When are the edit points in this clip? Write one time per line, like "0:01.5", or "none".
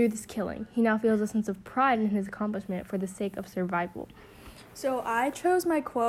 none